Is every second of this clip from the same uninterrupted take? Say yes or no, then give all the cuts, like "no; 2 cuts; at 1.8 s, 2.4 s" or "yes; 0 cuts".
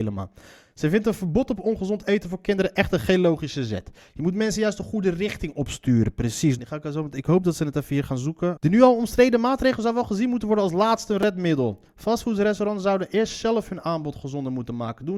no; 2 cuts; at 6.6 s, 8.6 s